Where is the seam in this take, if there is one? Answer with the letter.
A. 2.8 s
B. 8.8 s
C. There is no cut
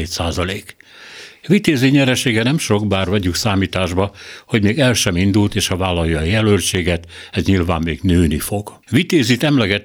B